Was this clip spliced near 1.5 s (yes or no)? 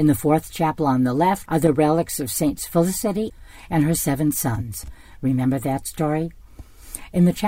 yes